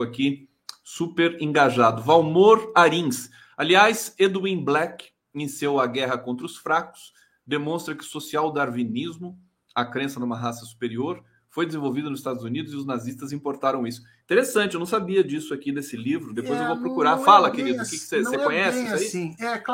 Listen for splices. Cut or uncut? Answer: uncut